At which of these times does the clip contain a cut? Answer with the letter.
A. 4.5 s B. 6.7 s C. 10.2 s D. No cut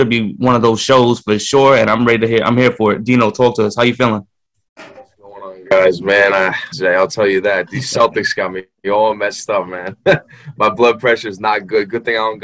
B